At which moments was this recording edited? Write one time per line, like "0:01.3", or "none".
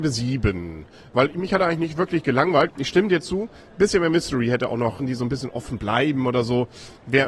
0:02.7
0:05.0